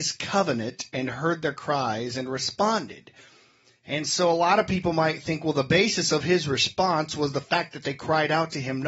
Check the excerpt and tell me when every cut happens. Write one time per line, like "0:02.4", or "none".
none